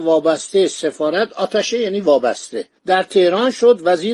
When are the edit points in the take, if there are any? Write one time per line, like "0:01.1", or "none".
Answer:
0:02.8